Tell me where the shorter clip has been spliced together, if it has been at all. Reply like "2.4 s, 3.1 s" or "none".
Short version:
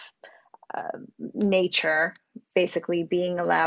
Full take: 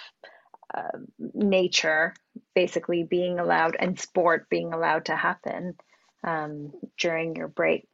none